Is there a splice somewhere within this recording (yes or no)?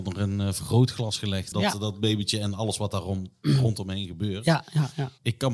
yes